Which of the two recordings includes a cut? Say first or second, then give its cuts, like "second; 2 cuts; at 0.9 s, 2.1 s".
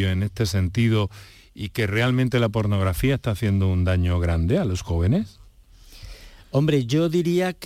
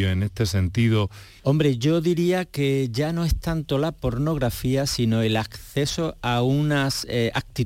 second; 1 cut; at 1.4 s